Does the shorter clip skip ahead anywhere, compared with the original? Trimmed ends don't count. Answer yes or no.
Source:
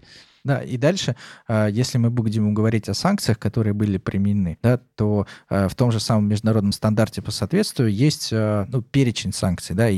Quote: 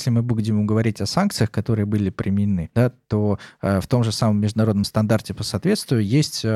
no